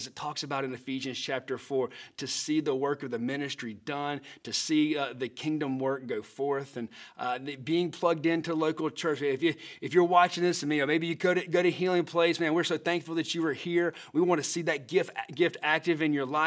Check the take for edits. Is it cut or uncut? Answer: uncut